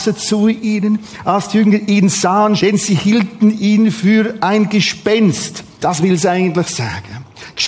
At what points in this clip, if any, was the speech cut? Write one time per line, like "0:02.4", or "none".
0:02.6
0:05.8